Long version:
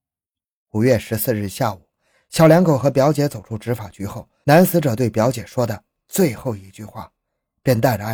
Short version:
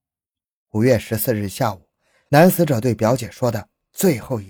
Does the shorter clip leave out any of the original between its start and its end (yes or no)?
yes